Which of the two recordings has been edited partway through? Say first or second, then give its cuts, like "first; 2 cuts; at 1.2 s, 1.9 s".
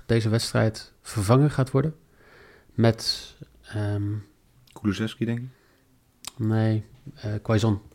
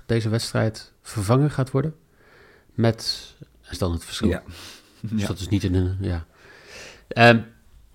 second; 1 cut; at 3.7 s